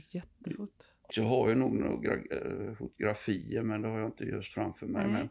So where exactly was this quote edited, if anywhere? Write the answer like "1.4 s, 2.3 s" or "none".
1.1 s